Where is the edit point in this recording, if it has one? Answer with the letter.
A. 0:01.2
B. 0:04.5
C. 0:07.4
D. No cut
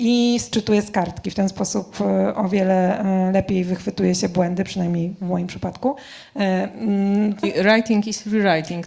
C